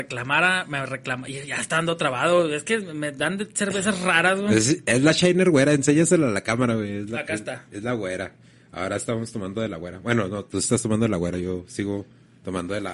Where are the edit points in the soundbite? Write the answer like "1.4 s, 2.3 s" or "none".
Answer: none